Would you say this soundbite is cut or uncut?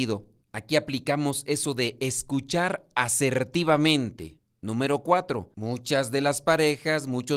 cut